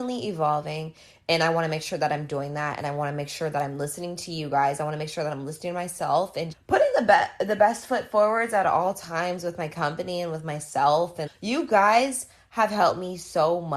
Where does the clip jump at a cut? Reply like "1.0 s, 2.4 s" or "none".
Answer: 6.5 s, 11.3 s